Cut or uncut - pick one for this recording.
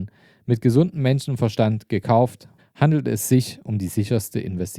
cut